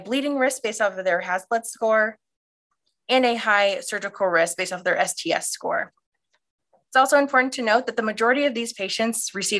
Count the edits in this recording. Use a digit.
0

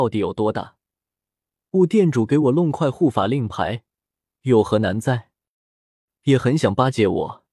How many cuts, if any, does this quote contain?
1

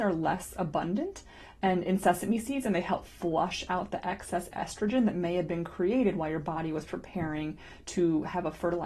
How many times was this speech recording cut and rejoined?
0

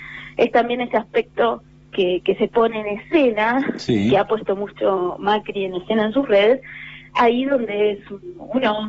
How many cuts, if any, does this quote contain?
0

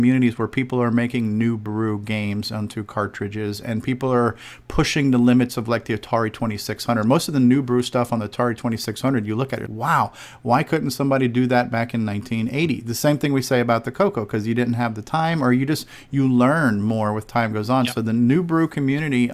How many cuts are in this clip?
1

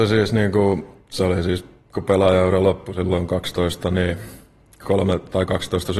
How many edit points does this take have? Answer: 0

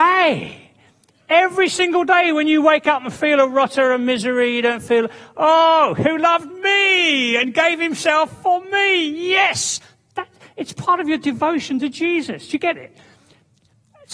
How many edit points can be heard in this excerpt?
0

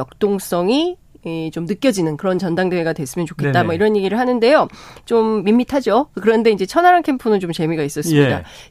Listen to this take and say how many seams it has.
0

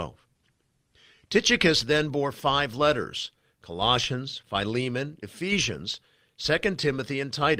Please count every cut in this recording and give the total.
0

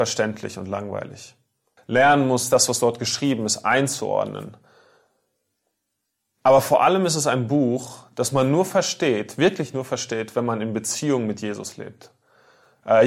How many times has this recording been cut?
1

